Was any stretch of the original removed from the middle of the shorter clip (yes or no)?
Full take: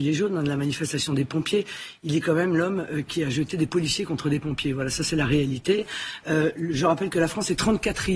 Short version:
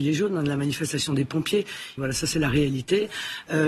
yes